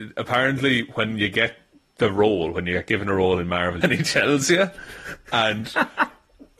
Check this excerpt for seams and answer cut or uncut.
cut